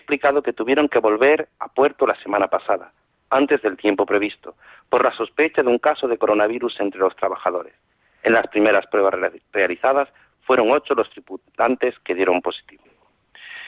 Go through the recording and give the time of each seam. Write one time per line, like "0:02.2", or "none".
none